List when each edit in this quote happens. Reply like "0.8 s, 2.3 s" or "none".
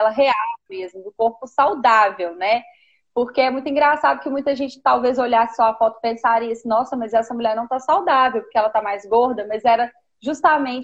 none